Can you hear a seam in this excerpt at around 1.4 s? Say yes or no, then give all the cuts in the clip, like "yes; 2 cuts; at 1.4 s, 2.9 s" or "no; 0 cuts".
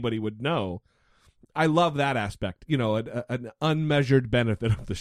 no; 1 cut; at 2.6 s